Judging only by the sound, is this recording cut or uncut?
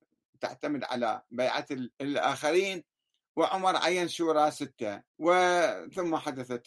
cut